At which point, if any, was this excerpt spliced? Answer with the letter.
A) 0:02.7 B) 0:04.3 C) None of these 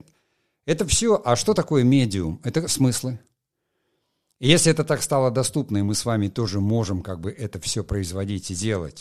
A